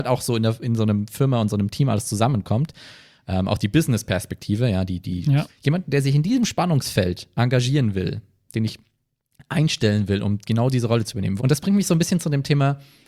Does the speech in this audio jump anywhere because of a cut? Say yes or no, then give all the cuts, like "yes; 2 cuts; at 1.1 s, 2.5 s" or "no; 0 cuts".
yes; 2 cuts; at 5.5 s, 11.4 s